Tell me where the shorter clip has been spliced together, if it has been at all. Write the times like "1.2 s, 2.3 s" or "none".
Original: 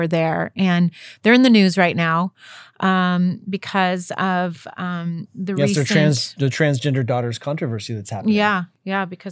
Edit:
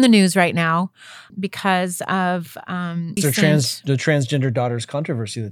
1.3 s, 3.2 s

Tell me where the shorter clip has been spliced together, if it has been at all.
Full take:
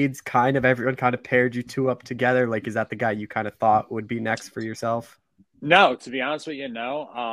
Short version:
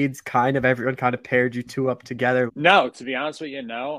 2.5 s

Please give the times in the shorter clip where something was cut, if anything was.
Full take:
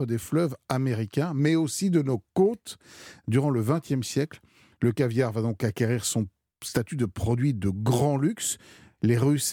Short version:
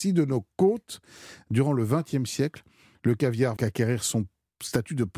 3.6 s

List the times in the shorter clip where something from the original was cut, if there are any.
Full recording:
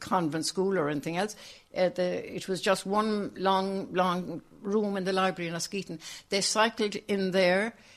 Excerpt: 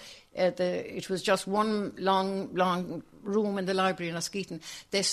none

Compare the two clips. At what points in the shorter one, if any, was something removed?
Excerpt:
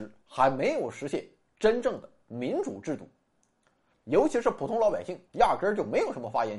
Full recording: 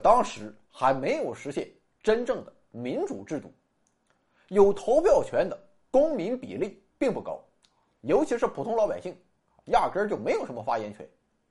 3.9 s, 5.3 s

